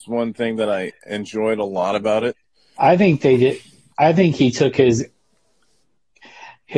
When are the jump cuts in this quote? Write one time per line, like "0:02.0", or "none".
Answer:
0:02.7